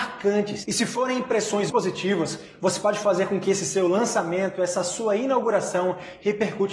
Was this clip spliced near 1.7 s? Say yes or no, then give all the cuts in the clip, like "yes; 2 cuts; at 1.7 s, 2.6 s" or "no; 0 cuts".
yes; 1 cut; at 1.7 s